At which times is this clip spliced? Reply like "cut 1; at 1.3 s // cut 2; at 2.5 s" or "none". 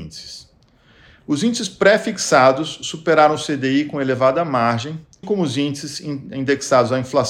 cut 1; at 5.2 s